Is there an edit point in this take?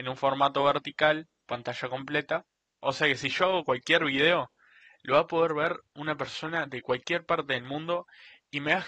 yes; 1 cut; at 2.7 s

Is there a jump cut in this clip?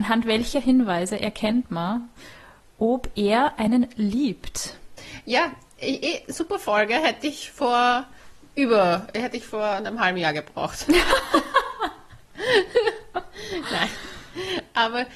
no; 0 cuts

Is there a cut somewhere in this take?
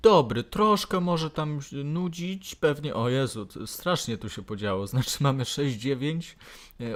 no; 0 cuts

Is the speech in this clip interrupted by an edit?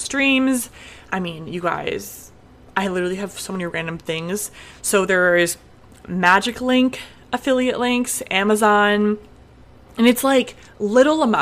no; 0 cuts

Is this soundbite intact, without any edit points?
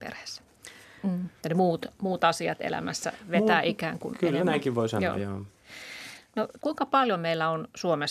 no; 2 cuts; at 1.0 s, 6.6 s

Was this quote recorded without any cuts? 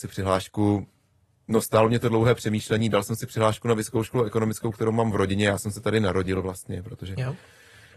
yes; 0 cuts

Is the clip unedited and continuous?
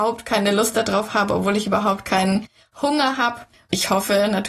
no; 1 cut; at 3.5 s

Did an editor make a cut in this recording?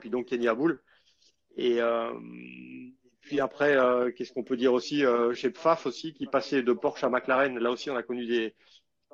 no; 0 cuts

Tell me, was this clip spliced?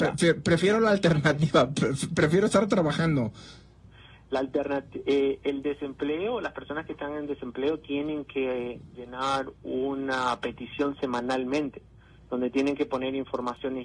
no; 0 cuts

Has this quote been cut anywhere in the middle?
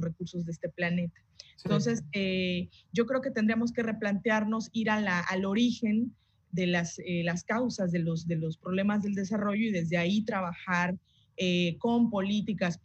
no; 0 cuts

